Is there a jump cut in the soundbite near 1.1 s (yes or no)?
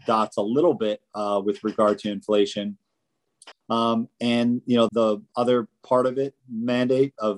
no